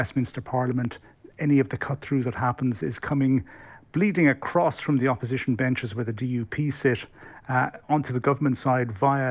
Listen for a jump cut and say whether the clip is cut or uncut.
uncut